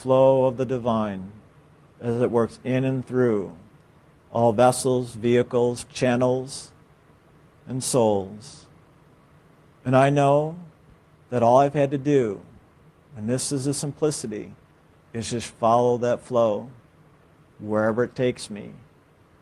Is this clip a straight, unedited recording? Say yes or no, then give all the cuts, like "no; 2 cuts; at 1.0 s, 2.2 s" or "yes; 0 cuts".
yes; 0 cuts